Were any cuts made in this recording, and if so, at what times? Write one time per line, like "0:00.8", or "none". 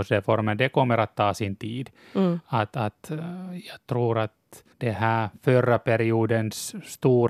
0:04.7